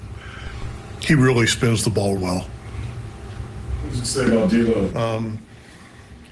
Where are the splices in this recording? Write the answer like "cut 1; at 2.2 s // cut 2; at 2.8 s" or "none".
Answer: cut 1; at 2.2 s // cut 2; at 4.9 s